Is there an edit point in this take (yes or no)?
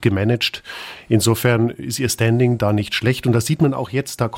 no